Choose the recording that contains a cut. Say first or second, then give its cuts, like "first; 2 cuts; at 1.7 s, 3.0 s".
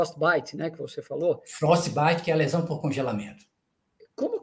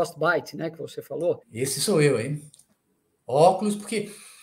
second; 1 cut; at 1.4 s